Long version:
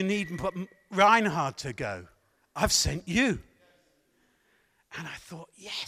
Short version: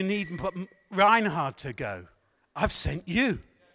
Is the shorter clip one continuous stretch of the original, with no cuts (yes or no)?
yes